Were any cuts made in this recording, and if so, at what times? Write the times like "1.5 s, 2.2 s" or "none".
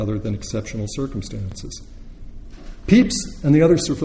2.8 s